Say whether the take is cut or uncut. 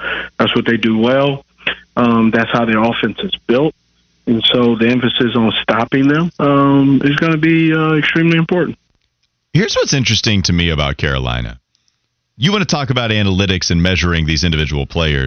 uncut